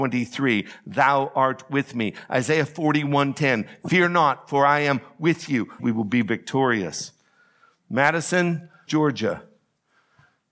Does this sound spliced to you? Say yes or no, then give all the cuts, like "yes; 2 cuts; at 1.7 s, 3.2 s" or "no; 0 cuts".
yes; 2 cuts; at 5.8 s, 8.9 s